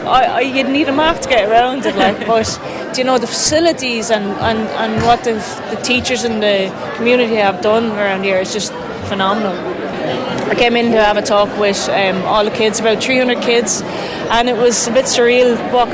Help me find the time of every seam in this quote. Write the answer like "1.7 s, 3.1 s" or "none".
none